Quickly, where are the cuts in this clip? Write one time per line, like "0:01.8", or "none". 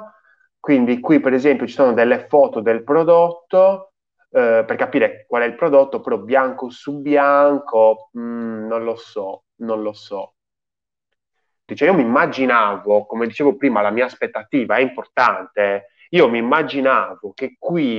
0:11.7

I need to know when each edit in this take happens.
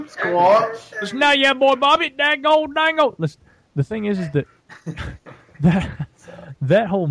none

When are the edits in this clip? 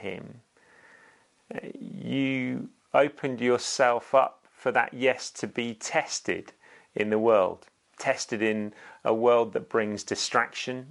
none

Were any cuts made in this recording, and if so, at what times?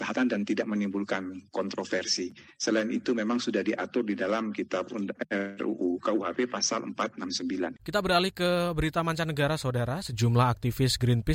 0:07.8

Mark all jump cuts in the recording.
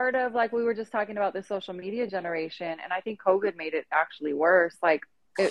none

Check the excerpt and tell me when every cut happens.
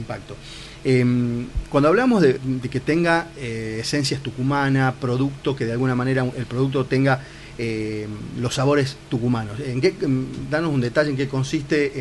0:02.4

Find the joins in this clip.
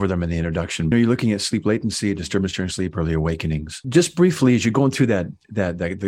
0:00.9

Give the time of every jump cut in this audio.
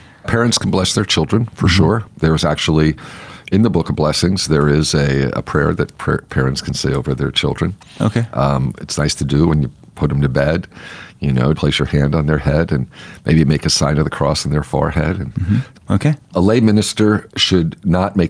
0:11.5
0:15.7
0:17.3

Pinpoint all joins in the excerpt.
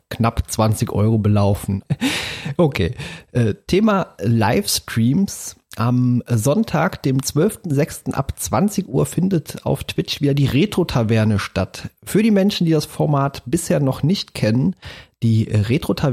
0:01.8

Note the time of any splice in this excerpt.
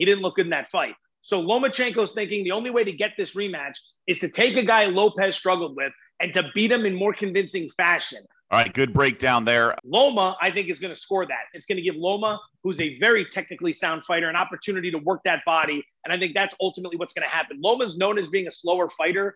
0:08.5
0:09.8
0:11.5

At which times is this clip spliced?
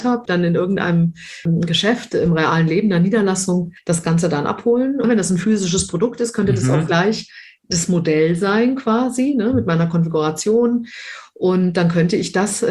0:05.0

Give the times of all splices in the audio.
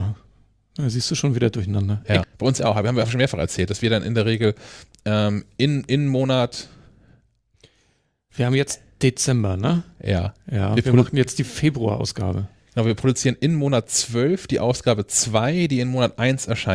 0:02.2

